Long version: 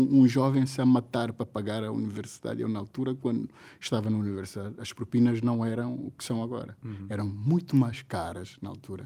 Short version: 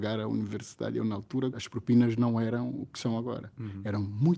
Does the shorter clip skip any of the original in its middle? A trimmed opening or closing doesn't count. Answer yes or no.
yes